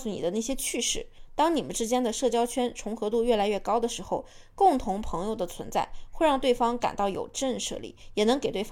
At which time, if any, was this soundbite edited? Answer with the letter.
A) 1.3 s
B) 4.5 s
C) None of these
C